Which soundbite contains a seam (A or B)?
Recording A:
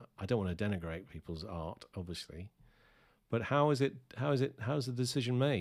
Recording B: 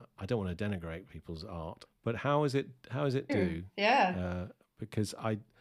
B